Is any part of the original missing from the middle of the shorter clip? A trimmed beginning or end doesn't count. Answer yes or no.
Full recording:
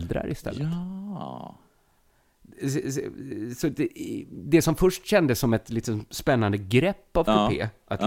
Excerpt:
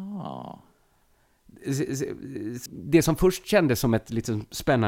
yes